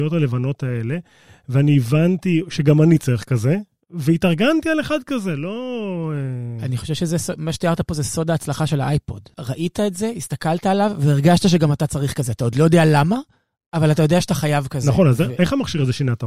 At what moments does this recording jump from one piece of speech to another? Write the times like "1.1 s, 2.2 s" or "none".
none